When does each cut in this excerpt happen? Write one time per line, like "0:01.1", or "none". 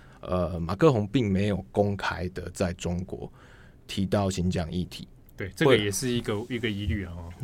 0:05.2